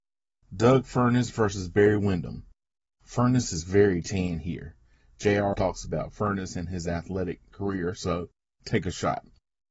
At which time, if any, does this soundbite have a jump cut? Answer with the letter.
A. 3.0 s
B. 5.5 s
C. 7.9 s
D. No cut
B